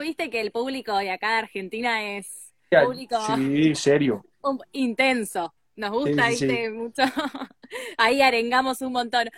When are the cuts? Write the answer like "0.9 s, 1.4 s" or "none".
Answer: 2.7 s

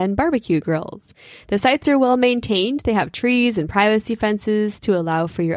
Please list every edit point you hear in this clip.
none

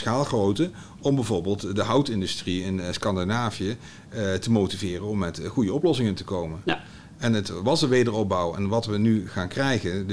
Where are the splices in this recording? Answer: none

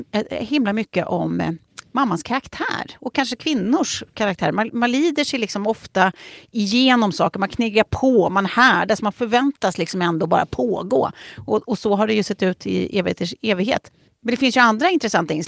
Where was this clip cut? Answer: 9.0 s

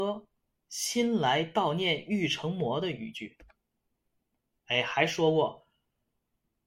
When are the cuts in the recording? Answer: none

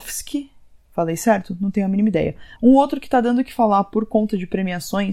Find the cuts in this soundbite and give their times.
2.6 s

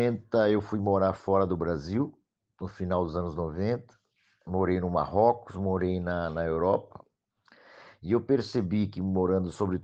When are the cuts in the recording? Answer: none

